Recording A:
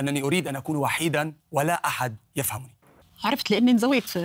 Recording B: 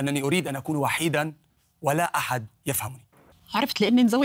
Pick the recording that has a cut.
A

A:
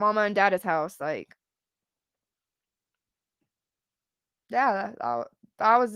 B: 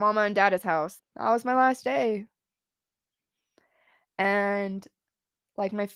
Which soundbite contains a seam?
B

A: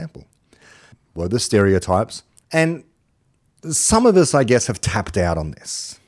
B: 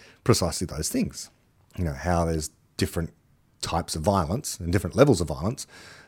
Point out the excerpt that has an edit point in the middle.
A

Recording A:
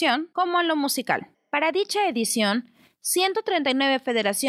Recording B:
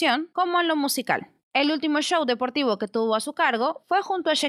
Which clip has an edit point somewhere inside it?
A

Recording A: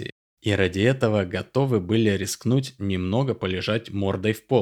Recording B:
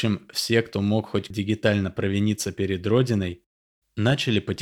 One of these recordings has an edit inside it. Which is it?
B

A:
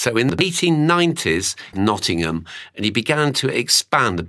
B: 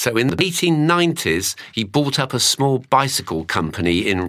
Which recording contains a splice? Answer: A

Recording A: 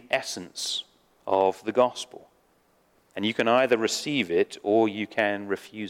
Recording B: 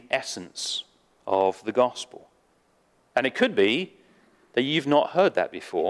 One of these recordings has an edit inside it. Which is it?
A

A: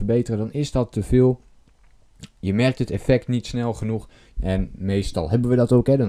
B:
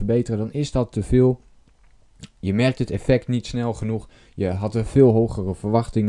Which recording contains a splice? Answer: A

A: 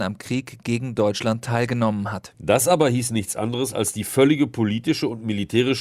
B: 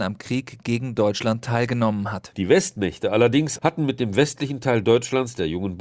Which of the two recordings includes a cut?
B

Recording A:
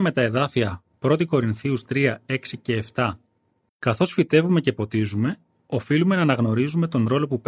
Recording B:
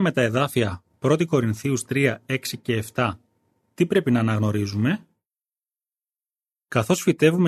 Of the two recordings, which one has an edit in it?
A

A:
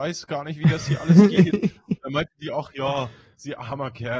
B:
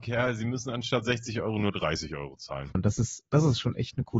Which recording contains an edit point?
B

